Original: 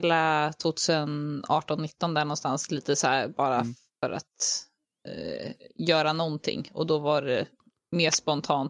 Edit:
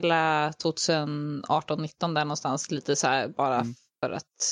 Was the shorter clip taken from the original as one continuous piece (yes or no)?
yes